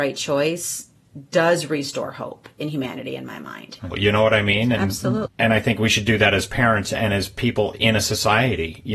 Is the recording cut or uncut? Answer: cut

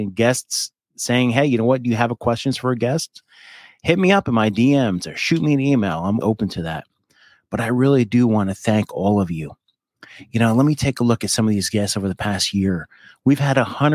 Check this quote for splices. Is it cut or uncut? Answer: cut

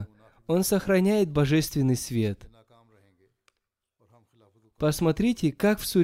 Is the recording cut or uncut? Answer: uncut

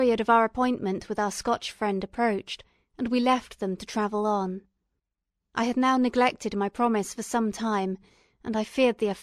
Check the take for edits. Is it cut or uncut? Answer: cut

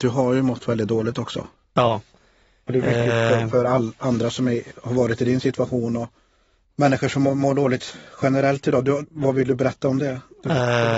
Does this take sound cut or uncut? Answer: cut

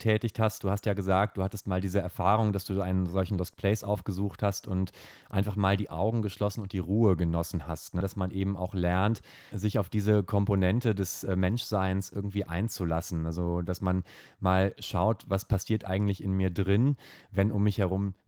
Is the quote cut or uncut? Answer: cut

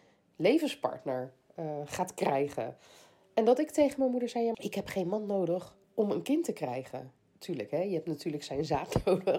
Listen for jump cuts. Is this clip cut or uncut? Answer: cut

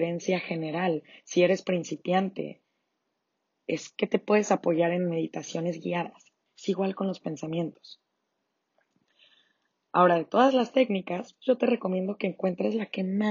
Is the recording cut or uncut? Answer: cut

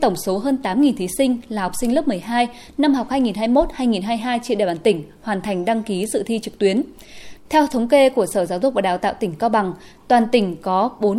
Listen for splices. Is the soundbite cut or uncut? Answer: cut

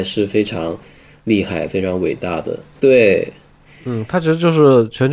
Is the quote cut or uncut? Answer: cut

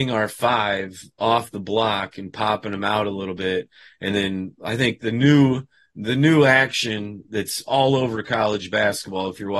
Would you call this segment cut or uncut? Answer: uncut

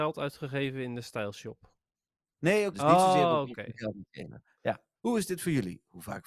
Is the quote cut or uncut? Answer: cut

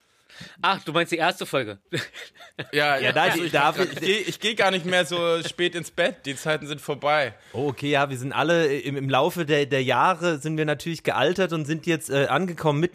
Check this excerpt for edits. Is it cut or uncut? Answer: uncut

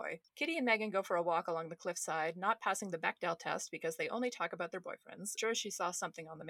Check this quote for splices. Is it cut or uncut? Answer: cut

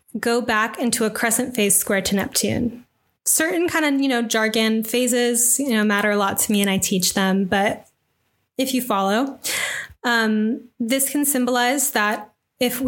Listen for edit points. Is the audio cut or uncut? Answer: uncut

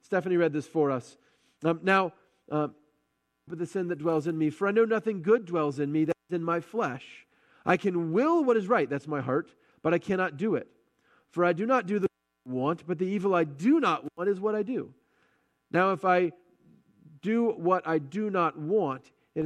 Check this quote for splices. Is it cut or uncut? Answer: cut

